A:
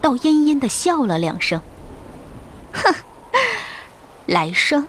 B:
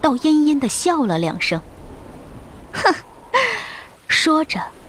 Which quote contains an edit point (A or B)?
B